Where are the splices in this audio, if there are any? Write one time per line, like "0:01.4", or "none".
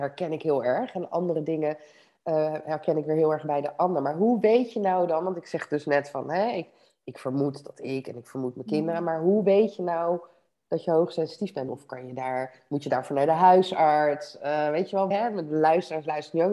0:11.7
0:15.1